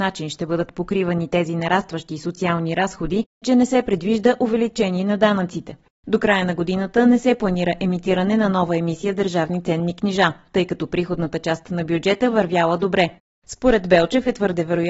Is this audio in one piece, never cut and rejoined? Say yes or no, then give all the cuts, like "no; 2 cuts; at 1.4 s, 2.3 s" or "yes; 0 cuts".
no; 2 cuts; at 3.4 s, 5.9 s